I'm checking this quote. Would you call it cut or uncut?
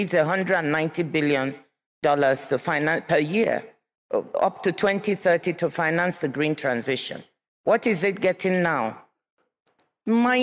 uncut